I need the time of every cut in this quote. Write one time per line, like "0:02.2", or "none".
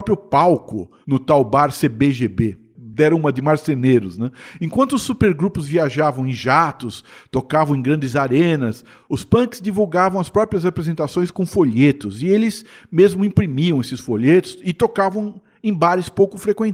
none